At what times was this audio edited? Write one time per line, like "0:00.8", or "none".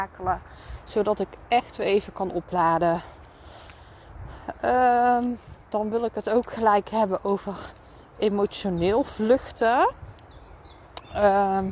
none